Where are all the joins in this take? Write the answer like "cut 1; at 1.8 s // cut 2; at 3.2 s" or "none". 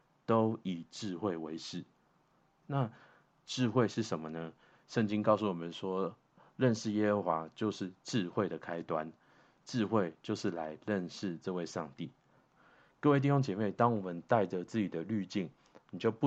none